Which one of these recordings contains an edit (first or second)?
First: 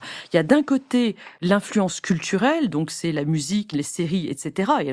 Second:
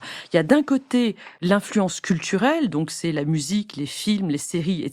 first